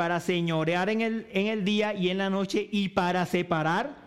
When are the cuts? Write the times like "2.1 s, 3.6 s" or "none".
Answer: none